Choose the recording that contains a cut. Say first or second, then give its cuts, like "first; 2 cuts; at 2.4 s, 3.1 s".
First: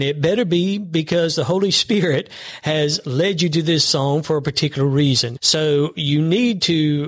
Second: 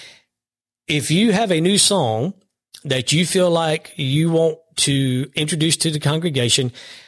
first; 1 cut; at 5.4 s